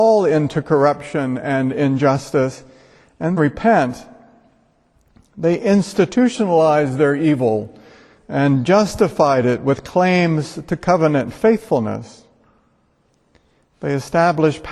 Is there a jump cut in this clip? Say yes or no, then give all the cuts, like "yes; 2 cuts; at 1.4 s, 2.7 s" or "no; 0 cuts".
yes; 1 cut; at 3.4 s